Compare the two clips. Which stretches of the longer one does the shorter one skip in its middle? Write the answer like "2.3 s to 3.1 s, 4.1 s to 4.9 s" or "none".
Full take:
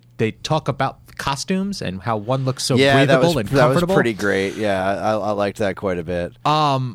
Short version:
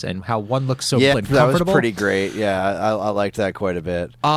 2.9 s to 3.3 s